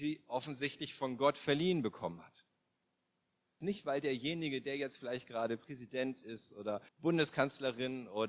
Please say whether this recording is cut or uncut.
cut